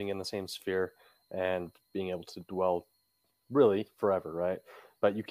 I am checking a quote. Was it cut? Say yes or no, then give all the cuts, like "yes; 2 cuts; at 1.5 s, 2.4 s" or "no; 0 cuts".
no; 0 cuts